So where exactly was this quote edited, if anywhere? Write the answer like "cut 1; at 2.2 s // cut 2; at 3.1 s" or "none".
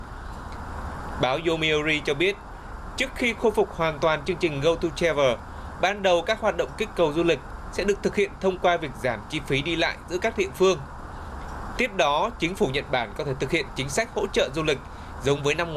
none